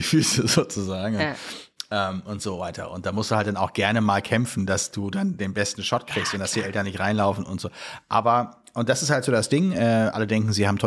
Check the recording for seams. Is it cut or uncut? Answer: uncut